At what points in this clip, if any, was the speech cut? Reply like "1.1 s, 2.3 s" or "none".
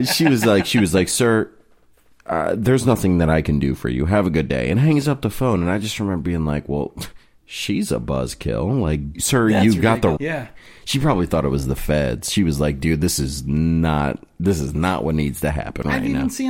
9.1 s, 10.2 s